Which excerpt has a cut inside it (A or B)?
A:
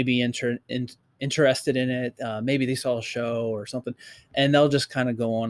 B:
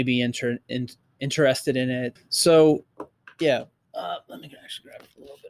B